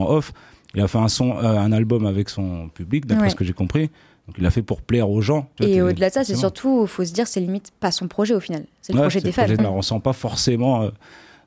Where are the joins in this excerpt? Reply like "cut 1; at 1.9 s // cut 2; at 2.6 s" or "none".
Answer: cut 1; at 5.6 s // cut 2; at 9.6 s

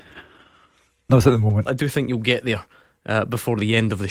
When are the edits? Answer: cut 1; at 1.7 s

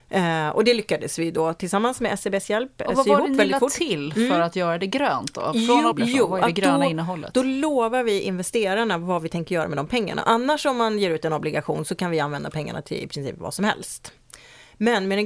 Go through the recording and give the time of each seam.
cut 1; at 5.9 s

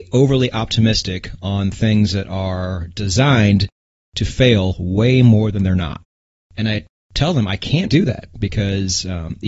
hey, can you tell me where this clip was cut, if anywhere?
cut 1; at 6.4 s // cut 2; at 7.9 s

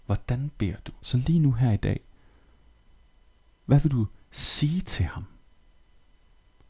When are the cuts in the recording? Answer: cut 1; at 1.0 s

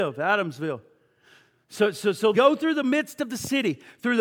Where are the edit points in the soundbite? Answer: cut 1; at 2.3 s

